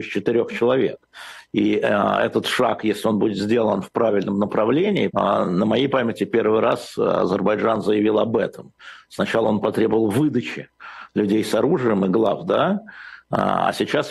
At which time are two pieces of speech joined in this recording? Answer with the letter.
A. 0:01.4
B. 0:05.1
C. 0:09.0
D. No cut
B